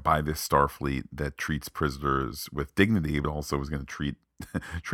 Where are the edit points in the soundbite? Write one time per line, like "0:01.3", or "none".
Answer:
none